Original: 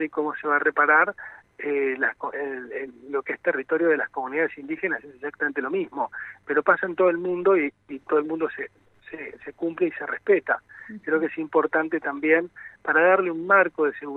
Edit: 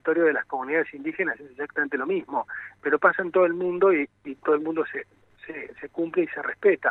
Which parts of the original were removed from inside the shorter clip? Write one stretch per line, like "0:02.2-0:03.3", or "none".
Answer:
none